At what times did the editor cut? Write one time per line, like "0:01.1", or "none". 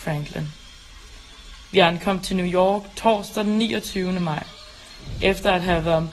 none